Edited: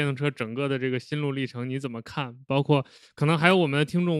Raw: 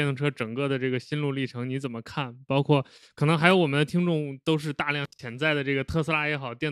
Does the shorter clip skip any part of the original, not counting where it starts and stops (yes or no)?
no